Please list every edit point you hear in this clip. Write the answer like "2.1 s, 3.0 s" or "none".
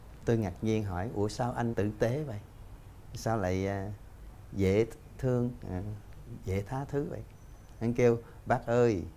1.7 s

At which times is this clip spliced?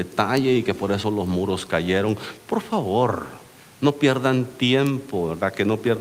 none

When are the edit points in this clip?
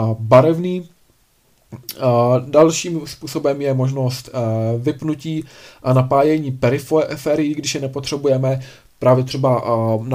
none

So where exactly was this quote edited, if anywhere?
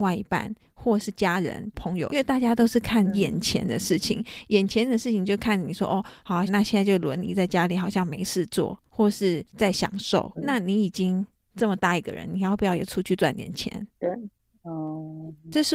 2.1 s, 6.5 s, 10.4 s

